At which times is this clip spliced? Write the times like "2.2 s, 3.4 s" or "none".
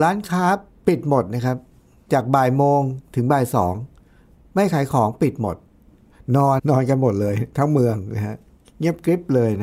6.6 s